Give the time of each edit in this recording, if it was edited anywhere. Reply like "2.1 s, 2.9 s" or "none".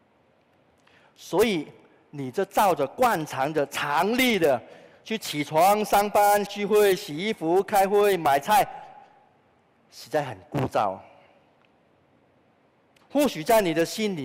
6.5 s, 13.0 s